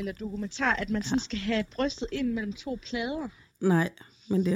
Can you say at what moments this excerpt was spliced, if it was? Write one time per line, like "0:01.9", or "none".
0:03.5

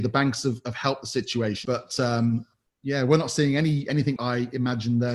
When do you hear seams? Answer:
0:01.6
0:04.2

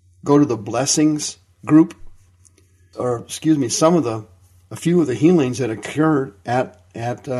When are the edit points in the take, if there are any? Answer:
0:02.9

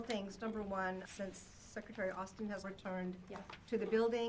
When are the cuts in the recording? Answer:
0:01.0
0:02.6

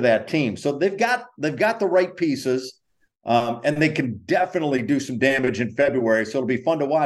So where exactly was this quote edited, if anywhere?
none

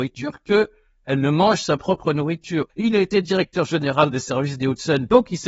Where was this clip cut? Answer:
0:02.7

